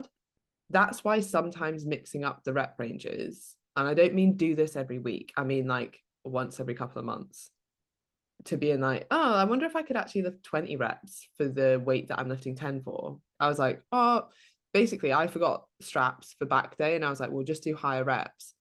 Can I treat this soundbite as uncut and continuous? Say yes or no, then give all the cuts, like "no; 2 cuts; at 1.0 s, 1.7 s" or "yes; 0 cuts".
no; 1 cut; at 13.4 s